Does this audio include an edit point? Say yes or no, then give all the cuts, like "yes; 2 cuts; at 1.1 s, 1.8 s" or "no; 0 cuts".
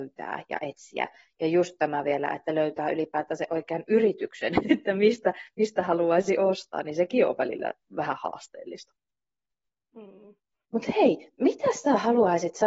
yes; 2 cuts; at 4.7 s, 10.7 s